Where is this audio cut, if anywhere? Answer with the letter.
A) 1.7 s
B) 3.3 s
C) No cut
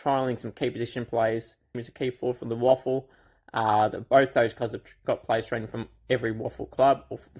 A